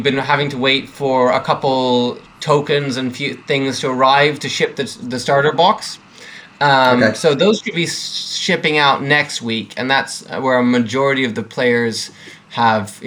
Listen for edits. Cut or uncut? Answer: uncut